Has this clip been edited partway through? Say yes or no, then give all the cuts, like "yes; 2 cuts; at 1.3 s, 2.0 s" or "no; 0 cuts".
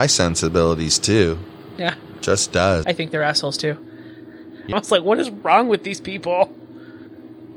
yes; 2 cuts; at 2.8 s, 4.7 s